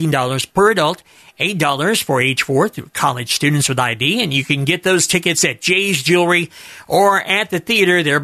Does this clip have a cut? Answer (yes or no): no